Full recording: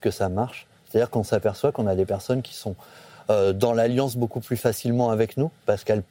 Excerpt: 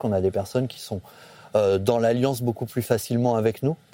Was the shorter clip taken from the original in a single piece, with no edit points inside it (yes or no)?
yes